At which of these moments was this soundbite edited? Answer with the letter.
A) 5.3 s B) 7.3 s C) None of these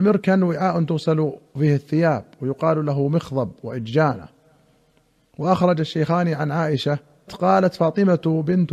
B